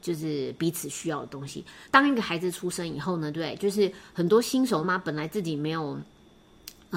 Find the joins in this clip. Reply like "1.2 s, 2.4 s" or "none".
1.8 s, 4.8 s